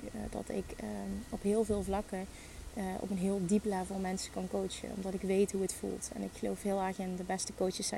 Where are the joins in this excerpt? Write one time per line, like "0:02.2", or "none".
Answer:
none